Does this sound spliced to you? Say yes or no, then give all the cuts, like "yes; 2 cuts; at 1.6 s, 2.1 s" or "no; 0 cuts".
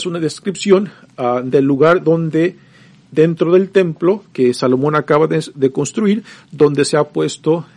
no; 0 cuts